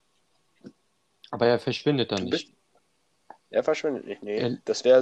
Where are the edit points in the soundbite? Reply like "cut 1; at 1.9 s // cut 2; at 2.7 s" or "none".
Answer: none